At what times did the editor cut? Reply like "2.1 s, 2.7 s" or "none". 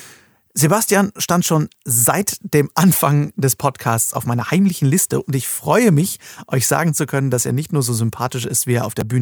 none